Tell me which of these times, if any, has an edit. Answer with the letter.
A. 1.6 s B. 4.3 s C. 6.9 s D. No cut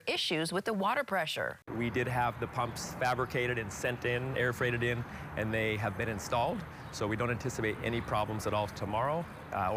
A